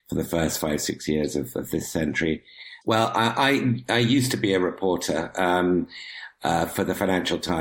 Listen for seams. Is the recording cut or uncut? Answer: cut